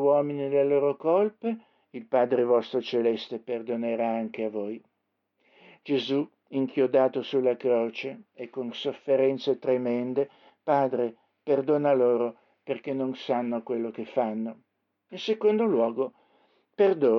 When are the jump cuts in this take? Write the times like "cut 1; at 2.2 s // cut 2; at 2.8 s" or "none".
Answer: cut 1; at 10.5 s // cut 2; at 15.1 s